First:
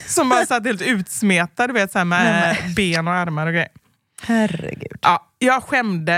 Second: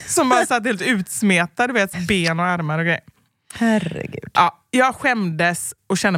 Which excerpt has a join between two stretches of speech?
second; 1 cut; at 1.9 s

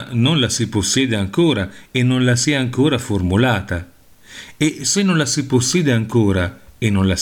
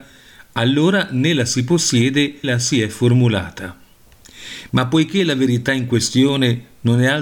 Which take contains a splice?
second; 1 cut; at 2.4 s

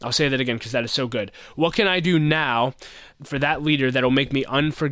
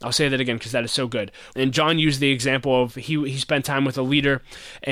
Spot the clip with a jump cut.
second; 1 cut; at 1.5 s

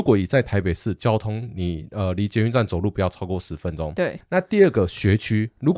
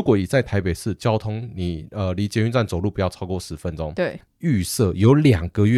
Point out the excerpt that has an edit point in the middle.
second; 1 cut; at 4.3 s

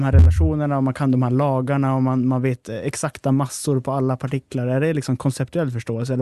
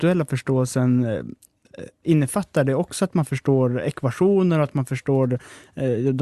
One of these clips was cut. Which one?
second; 1 cut; at 2.0 s

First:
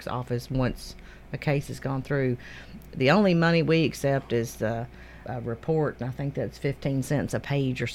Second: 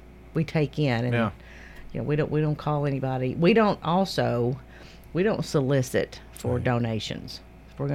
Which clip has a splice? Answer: first; 1 cut; at 5.2 s

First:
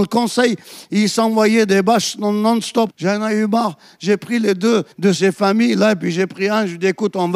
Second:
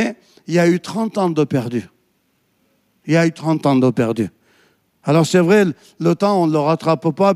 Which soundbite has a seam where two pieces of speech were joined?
first; 2 cuts; at 2.9 s, 4.9 s

